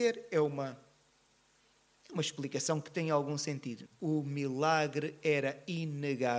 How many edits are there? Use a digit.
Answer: 1